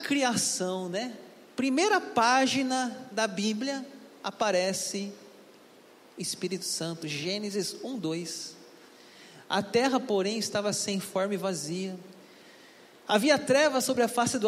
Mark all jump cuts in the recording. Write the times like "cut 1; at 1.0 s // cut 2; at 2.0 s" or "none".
none